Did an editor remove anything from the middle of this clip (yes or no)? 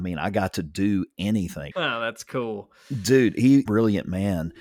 yes